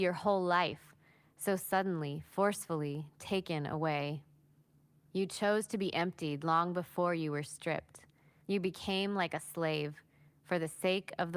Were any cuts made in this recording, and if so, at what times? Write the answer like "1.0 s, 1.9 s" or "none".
5.1 s, 8.4 s